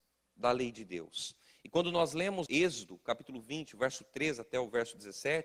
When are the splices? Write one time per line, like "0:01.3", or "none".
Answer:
0:02.5